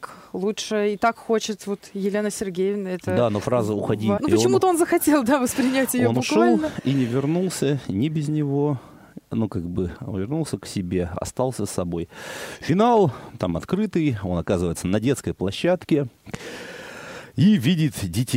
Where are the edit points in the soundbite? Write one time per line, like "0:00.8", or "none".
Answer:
0:04.2